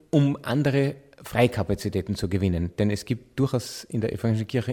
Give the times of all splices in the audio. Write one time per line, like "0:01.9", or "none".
none